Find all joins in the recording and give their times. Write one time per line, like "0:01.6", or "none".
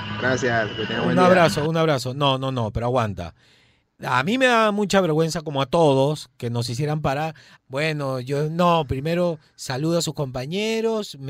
0:07.6
0:08.9